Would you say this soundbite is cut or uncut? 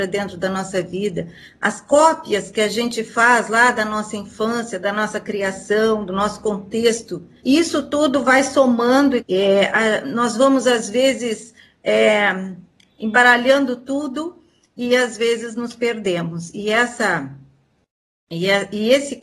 cut